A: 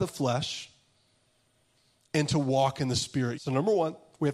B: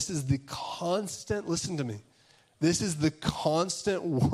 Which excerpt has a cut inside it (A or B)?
A